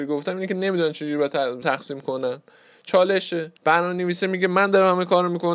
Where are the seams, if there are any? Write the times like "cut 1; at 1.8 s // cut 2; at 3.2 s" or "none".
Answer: cut 1; at 1.6 s // cut 2; at 3.6 s